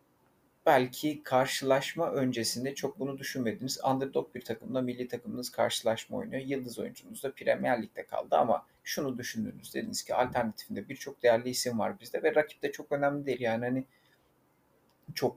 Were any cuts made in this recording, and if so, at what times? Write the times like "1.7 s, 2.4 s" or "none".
13.4 s